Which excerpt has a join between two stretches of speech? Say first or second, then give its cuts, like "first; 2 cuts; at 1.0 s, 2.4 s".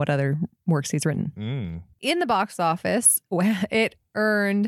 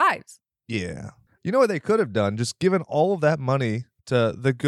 second; 1 cut; at 1.4 s